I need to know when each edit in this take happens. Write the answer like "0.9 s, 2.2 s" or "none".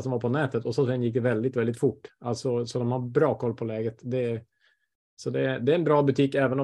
none